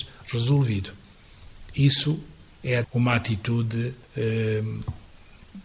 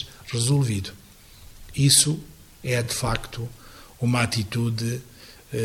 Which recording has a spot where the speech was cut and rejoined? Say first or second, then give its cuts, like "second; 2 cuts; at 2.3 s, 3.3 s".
first; 2 cuts; at 2.8 s, 4.0 s